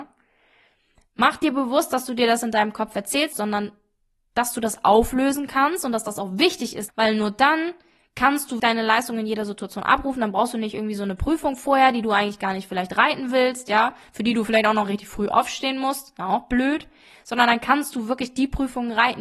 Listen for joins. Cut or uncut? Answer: cut